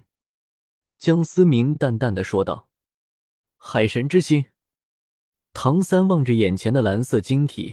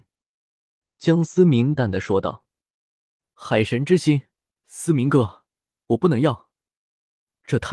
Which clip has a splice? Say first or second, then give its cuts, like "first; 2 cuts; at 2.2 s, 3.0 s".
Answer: second; 2 cuts; at 1.8 s, 4.6 s